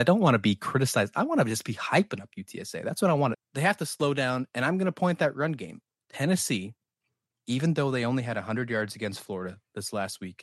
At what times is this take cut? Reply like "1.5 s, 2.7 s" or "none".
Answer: 3.3 s

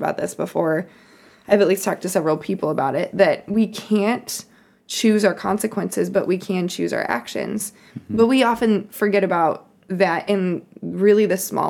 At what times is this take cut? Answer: none

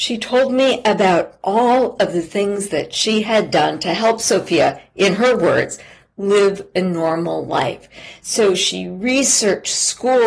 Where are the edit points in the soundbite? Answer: none

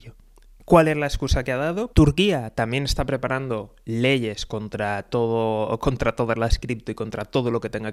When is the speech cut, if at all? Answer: 1.9 s

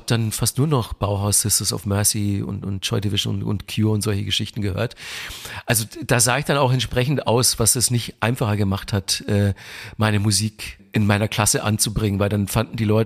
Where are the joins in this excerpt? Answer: none

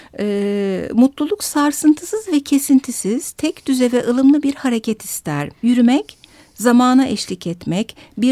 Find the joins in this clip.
5.6 s

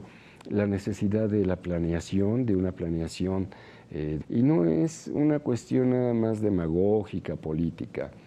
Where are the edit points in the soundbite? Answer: 4.2 s

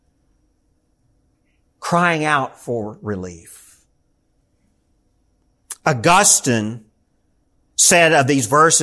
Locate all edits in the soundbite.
none

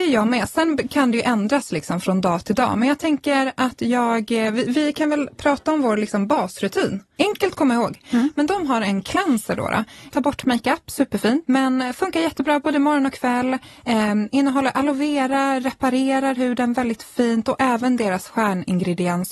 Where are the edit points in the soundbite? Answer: 7.2 s, 10.1 s, 11.5 s

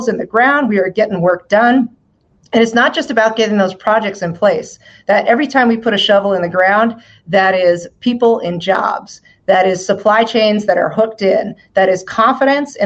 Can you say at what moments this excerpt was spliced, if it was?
none

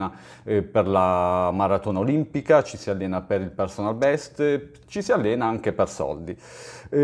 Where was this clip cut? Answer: none

